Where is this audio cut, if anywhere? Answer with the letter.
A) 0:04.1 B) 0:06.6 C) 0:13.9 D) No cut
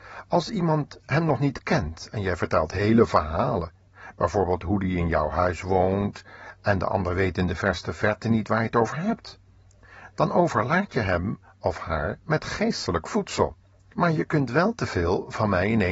C